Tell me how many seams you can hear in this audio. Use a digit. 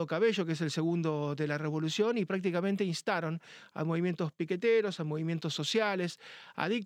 0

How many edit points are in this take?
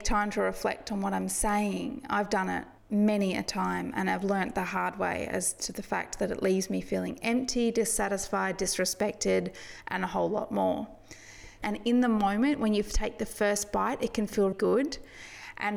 3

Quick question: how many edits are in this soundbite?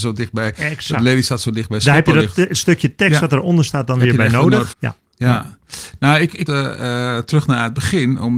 2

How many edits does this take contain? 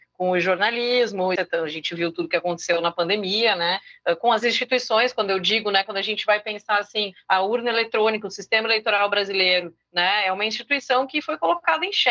1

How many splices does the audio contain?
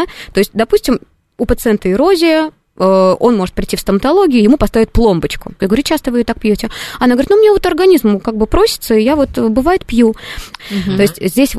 2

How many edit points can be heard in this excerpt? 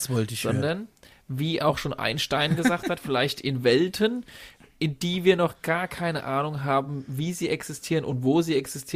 0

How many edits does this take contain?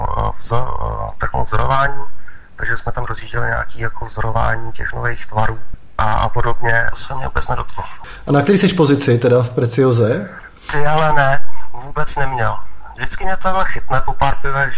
3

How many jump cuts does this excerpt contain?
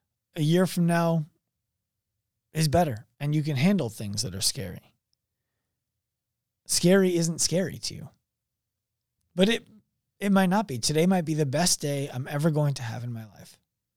2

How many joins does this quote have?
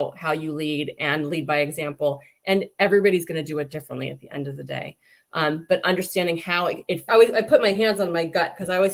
1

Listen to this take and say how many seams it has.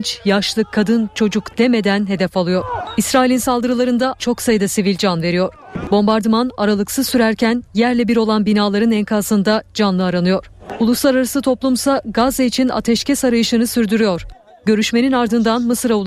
2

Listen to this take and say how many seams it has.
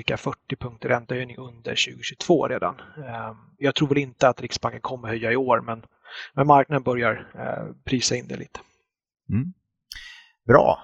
0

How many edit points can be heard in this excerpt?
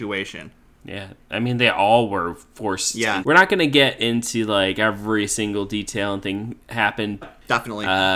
2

